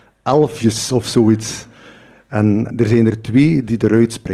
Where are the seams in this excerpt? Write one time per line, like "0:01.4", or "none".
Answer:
0:02.7